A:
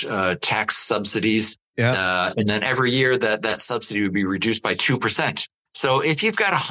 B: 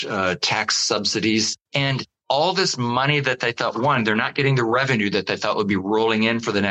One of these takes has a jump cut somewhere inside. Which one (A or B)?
B